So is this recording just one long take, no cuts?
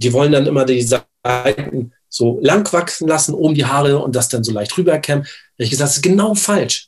yes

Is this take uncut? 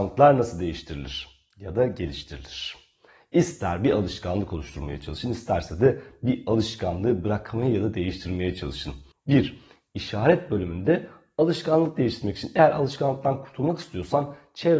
no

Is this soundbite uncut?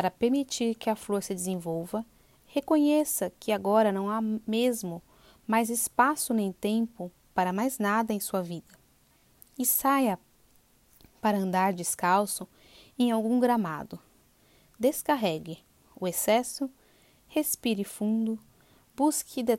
yes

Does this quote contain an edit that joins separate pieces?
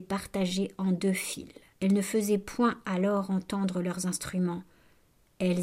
yes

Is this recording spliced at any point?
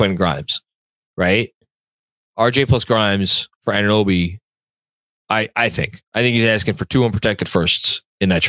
yes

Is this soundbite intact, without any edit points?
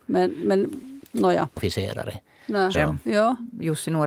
no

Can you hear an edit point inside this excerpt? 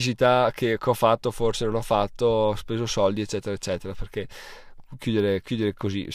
no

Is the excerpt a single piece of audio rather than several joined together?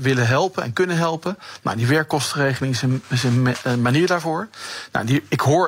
yes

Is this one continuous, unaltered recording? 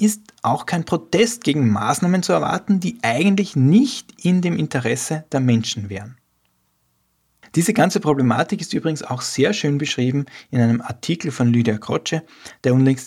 yes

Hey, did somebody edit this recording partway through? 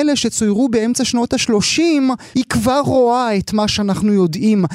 yes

